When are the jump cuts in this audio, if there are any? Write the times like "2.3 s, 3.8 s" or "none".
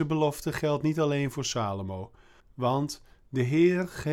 2.4 s